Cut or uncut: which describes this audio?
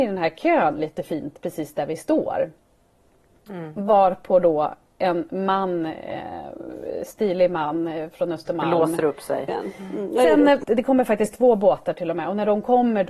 cut